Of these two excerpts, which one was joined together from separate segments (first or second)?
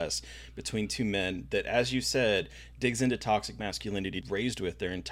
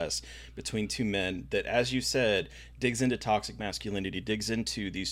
first